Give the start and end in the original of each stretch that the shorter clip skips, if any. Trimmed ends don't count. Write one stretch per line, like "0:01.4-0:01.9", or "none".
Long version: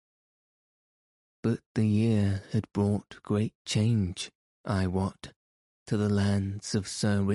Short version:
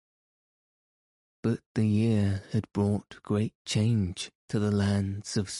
0:04.4-0:05.8

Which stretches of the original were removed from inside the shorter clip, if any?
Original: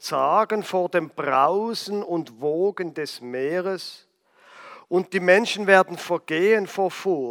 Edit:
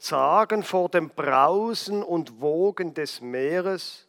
none

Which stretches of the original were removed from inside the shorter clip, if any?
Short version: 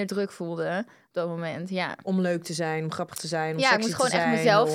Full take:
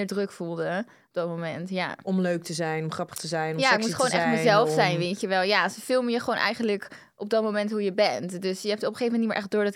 none

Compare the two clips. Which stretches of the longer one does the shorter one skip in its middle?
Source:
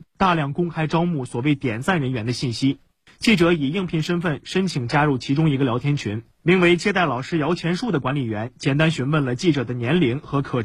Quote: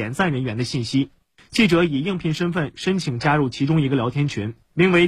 none

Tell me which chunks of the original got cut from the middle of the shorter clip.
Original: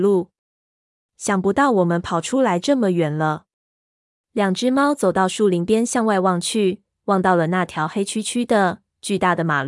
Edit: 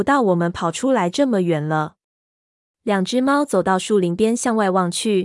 none

